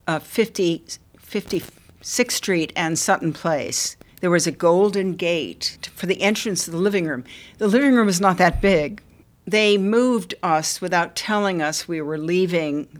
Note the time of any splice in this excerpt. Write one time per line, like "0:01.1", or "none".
0:04.1
0:09.2